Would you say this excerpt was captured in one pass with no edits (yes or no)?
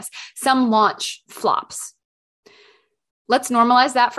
yes